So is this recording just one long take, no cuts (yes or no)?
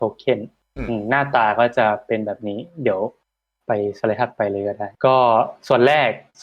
no